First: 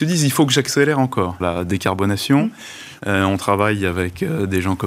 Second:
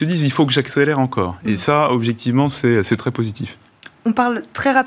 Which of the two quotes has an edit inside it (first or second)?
first